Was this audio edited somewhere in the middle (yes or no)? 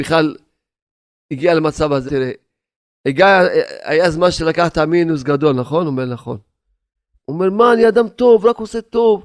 yes